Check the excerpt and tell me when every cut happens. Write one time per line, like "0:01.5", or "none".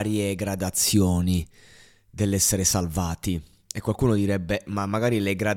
0:04.7